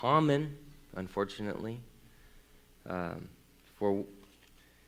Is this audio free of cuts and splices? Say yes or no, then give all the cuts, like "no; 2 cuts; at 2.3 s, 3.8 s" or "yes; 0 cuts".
no; 1 cut; at 2.7 s